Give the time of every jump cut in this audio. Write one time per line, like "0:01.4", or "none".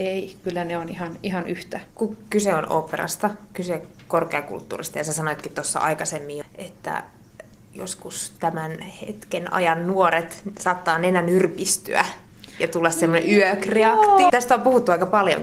0:01.9
0:06.4
0:14.3